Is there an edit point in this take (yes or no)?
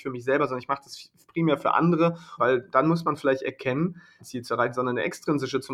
yes